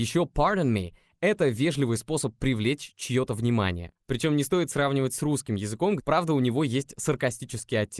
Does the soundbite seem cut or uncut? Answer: cut